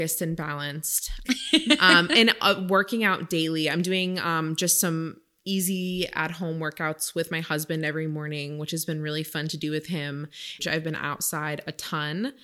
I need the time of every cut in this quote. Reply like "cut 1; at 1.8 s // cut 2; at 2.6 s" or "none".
cut 1; at 1.2 s // cut 2; at 10.6 s